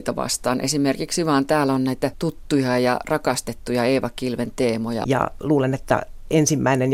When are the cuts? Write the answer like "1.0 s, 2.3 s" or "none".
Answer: 5.0 s